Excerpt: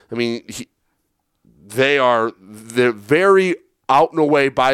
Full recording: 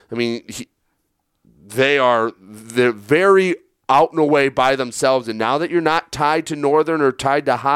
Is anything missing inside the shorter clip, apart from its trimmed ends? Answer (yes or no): no